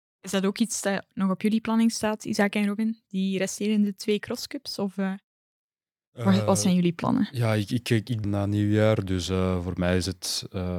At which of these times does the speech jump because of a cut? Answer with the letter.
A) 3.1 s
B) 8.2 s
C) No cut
B